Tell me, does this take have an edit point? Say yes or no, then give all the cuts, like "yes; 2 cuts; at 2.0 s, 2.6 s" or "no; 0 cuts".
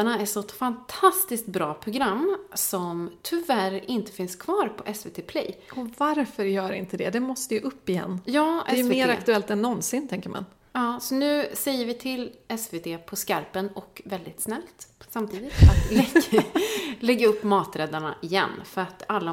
no; 0 cuts